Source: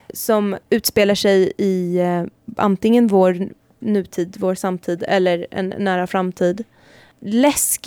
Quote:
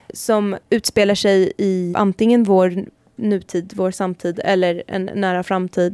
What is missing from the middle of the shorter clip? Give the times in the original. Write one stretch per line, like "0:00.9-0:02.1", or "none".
0:01.9-0:02.5